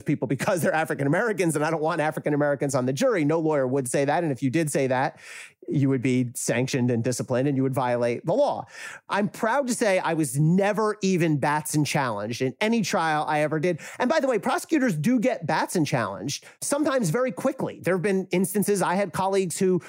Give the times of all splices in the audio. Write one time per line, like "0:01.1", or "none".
0:09.1